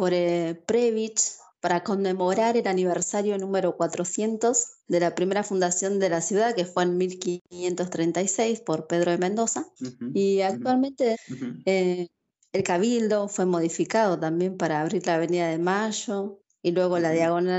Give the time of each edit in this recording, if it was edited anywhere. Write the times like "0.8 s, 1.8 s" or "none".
9.8 s, 11.1 s